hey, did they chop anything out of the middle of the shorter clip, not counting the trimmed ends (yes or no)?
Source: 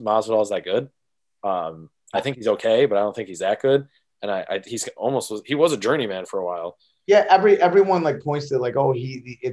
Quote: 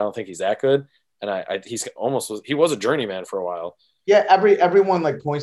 no